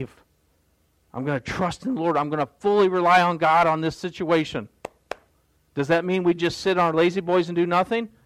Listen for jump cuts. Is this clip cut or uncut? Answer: uncut